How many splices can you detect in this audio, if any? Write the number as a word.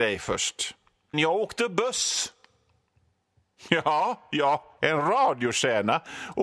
two